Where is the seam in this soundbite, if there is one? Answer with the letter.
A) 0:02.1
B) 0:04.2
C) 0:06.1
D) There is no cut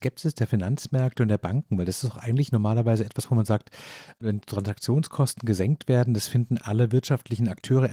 D